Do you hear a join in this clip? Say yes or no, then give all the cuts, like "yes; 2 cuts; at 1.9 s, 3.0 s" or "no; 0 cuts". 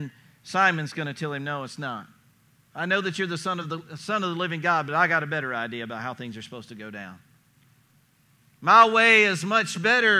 no; 0 cuts